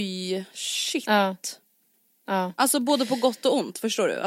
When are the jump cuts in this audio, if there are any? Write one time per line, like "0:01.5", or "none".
none